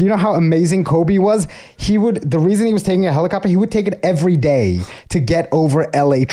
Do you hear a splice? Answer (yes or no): no